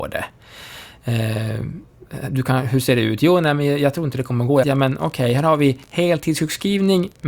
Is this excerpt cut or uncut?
cut